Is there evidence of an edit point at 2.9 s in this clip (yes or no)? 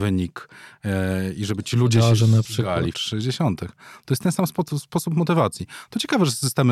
yes